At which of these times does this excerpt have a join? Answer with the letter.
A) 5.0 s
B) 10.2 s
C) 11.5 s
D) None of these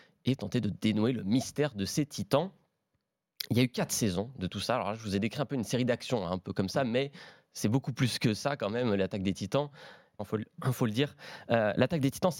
B